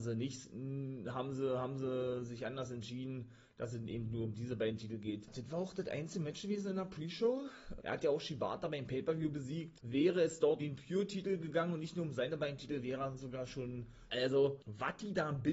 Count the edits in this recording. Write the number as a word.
three